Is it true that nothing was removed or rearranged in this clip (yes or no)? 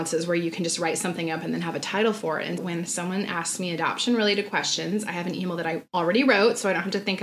no